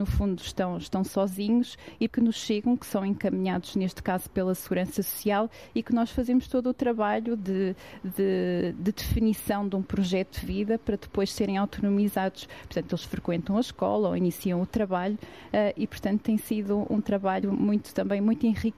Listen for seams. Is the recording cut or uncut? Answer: cut